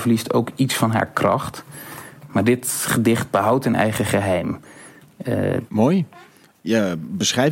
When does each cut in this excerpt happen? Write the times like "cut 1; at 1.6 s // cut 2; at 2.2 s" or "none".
cut 1; at 5.7 s